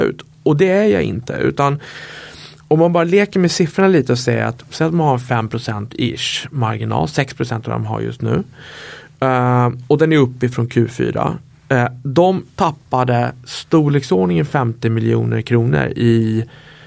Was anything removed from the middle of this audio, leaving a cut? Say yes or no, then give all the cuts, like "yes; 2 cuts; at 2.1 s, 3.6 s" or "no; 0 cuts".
no; 0 cuts